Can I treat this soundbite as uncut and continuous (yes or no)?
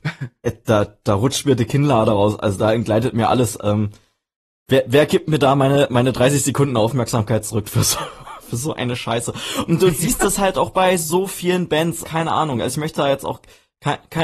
no